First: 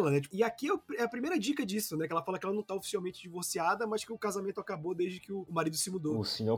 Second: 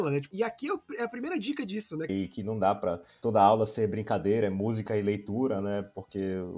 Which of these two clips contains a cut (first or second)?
second